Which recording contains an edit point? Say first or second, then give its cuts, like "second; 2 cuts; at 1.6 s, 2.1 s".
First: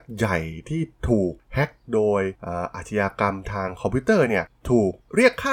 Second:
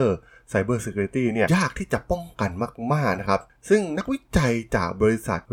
second; 1 cut; at 1.5 s